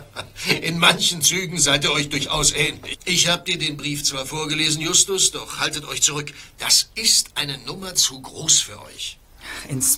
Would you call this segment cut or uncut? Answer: cut